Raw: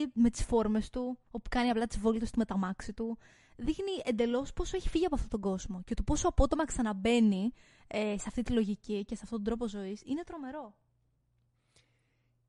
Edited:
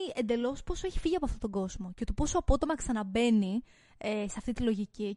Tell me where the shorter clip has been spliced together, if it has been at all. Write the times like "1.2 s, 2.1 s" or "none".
none